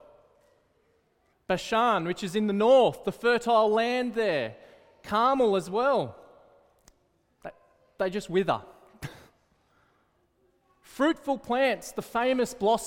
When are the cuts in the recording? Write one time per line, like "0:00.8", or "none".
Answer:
0:01.3